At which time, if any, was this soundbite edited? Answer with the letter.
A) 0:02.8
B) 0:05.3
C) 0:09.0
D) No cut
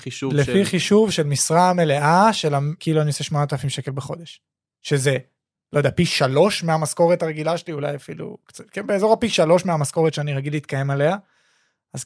A